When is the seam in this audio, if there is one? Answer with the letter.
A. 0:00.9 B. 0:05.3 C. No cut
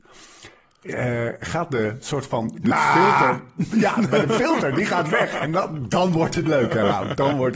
C